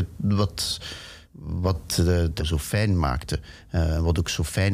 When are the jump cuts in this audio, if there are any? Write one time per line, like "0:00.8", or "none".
0:01.2
0:02.4

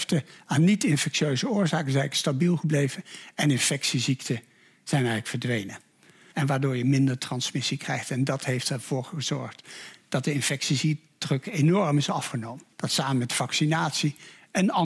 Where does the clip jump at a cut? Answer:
0:06.3
0:12.7

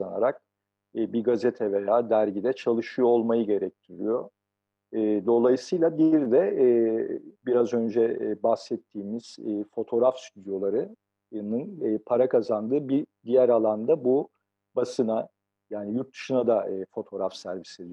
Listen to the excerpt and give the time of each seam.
0:07.4

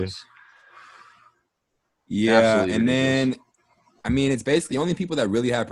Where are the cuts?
0:04.7

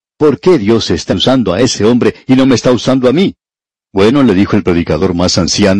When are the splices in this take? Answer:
0:01.1
0:03.8

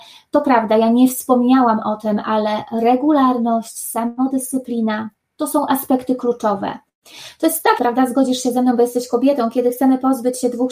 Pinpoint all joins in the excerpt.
0:07.8

